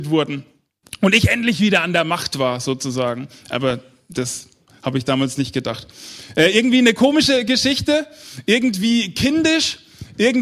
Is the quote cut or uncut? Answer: uncut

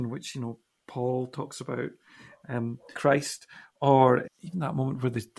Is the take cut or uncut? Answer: cut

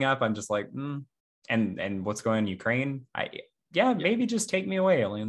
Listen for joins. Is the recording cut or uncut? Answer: uncut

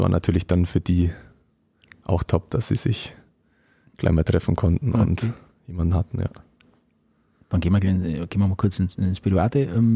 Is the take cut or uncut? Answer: uncut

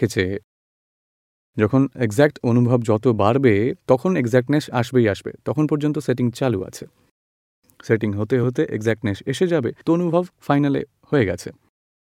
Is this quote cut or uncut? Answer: cut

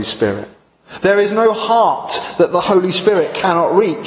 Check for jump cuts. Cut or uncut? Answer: uncut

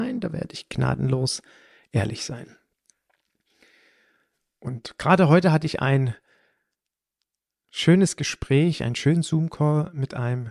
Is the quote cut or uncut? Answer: uncut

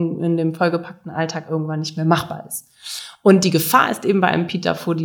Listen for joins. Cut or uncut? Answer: uncut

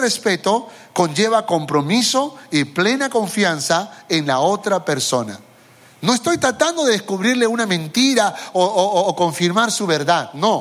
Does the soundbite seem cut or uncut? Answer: uncut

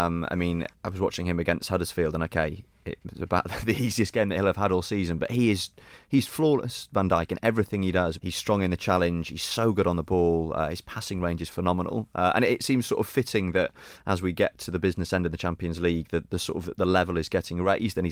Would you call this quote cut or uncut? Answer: cut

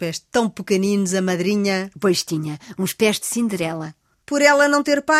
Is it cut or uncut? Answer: cut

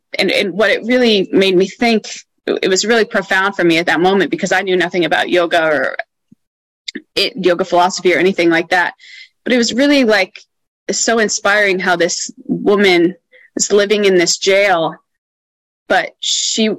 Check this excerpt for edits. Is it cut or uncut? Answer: uncut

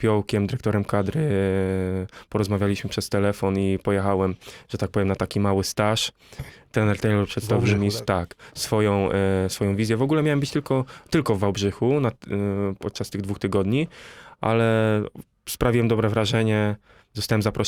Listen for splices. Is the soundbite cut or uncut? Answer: uncut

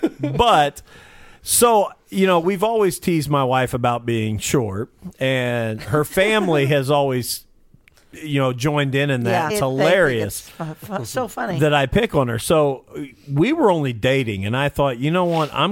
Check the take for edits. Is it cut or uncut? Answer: cut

